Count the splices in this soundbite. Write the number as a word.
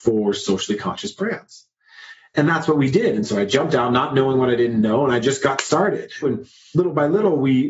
one